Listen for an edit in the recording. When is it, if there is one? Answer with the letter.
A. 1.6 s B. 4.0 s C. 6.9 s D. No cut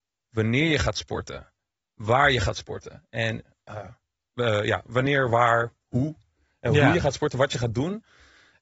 D